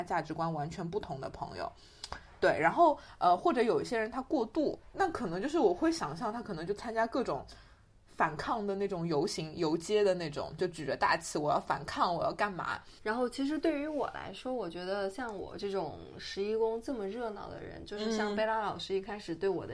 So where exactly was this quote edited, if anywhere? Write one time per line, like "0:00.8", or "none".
0:04.9
0:13.0